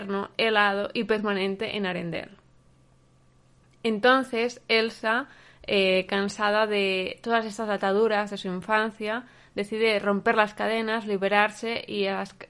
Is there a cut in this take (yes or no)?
no